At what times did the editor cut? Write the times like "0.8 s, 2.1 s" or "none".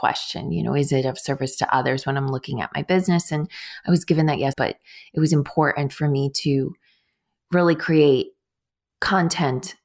4.5 s